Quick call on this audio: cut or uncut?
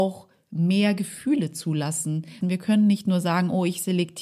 cut